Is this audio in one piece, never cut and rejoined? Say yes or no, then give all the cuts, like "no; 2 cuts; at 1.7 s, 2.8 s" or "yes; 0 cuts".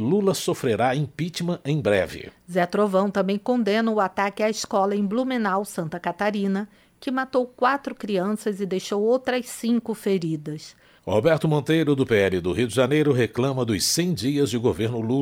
no; 1 cut; at 11.0 s